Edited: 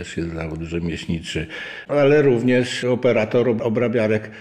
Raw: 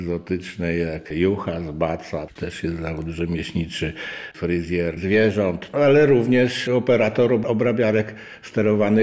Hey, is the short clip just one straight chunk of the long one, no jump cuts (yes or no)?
no